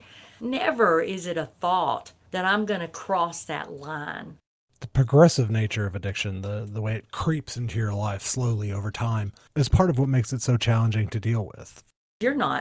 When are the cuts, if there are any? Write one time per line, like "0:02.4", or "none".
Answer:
none